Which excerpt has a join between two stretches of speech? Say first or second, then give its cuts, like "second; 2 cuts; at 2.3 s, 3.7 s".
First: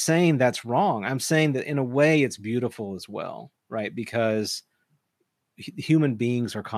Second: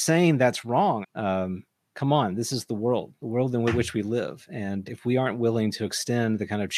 second; 2 cuts; at 1.0 s, 4.9 s